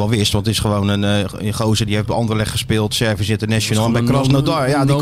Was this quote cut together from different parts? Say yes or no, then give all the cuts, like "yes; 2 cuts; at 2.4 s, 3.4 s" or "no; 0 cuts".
no; 0 cuts